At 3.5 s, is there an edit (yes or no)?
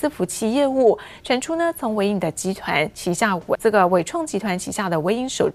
yes